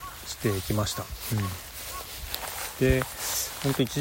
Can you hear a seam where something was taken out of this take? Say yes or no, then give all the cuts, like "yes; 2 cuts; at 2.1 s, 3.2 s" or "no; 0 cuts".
no; 0 cuts